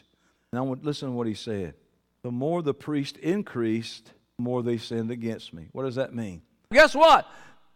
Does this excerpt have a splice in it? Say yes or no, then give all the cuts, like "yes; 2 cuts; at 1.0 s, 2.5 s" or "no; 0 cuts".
yes; 1 cut; at 6.7 s